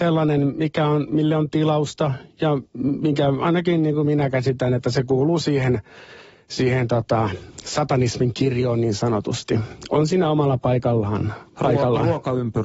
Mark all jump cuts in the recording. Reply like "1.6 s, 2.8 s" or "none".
none